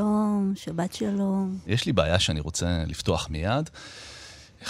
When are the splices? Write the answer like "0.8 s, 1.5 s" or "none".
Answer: 1.7 s